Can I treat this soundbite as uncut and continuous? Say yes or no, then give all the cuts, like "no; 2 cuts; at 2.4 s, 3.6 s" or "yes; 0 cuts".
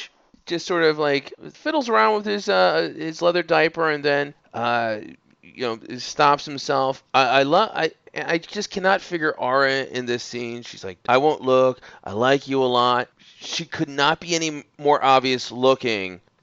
no; 1 cut; at 11.0 s